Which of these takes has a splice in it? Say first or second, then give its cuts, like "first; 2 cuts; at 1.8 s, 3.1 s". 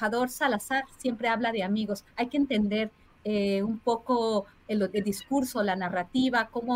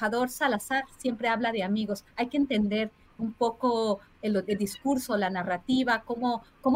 second; 1 cut; at 3.2 s